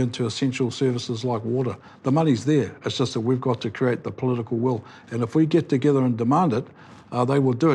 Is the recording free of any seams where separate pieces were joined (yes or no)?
yes